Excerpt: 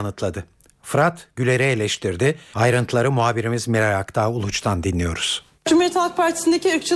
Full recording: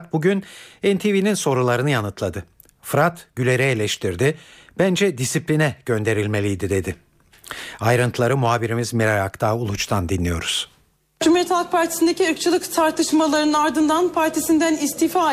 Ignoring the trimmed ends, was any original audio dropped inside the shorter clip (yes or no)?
yes